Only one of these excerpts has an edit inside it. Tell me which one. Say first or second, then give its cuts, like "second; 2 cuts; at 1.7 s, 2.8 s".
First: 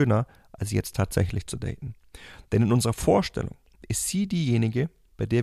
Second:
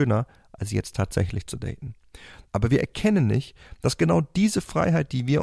second; 1 cut; at 2.5 s